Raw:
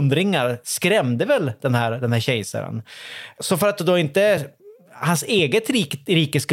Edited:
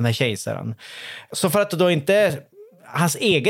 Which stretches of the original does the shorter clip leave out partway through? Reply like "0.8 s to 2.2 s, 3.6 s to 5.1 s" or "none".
none